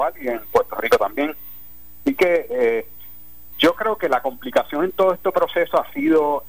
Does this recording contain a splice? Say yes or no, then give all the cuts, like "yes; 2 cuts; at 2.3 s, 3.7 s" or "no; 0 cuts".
yes; 1 cut; at 3.5 s